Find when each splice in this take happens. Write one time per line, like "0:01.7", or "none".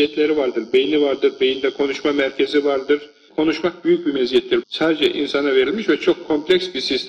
0:03.3
0:04.6